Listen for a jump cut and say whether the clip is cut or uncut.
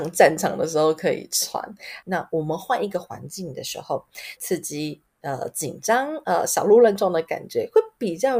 cut